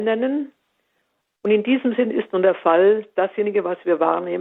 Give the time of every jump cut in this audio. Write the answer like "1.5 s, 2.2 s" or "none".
none